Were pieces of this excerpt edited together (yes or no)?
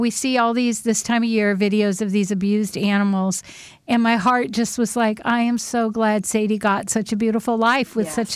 no